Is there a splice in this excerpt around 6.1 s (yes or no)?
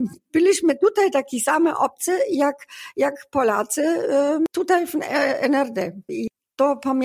yes